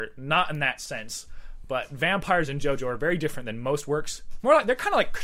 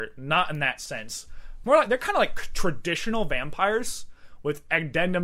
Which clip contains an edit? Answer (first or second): second